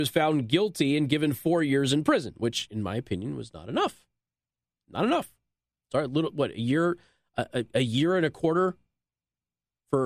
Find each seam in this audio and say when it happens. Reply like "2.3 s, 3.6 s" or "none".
none